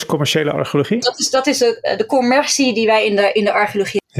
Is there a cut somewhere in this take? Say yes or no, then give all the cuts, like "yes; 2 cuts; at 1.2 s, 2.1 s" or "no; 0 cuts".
yes; 1 cut; at 1.0 s